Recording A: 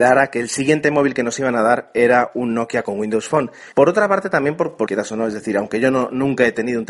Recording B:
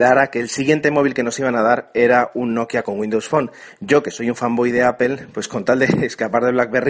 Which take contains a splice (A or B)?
A